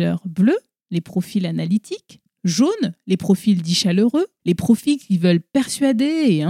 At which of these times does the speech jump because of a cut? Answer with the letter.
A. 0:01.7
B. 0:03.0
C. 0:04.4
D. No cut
C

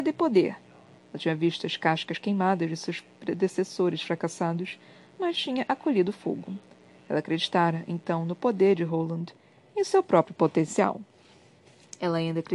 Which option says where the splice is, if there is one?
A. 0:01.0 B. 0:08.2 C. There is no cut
A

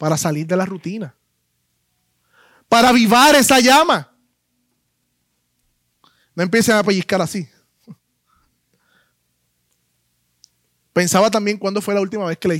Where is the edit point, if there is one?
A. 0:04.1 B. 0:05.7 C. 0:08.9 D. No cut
D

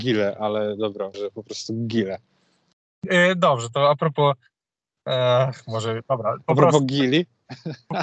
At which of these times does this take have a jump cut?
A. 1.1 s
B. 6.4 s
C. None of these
A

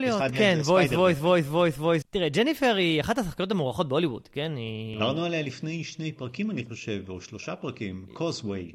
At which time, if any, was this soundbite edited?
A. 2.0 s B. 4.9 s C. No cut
A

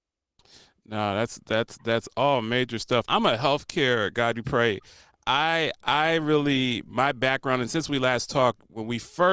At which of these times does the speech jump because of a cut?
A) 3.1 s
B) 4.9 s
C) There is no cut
A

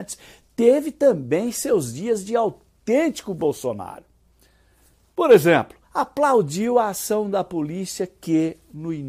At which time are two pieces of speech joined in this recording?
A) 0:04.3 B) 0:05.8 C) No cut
B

